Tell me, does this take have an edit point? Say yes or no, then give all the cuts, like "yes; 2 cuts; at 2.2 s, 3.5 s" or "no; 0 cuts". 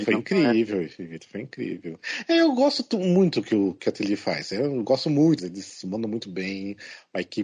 yes; 1 cut; at 5.4 s